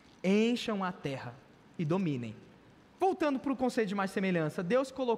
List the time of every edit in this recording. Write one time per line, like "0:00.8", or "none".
0:02.9